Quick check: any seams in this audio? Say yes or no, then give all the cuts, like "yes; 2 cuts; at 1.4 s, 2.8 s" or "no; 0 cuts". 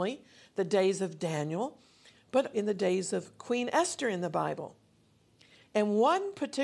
yes; 1 cut; at 2.5 s